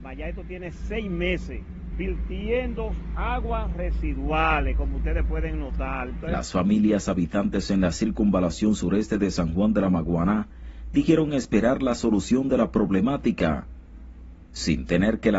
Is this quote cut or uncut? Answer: cut